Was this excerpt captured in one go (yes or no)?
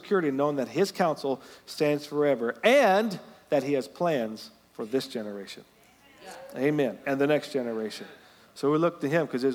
yes